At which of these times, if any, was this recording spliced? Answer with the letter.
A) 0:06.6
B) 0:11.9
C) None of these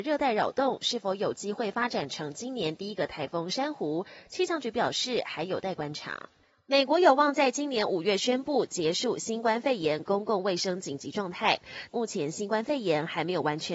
B